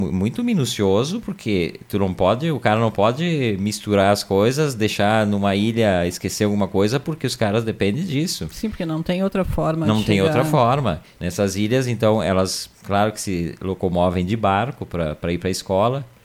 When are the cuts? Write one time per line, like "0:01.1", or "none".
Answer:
0:11.2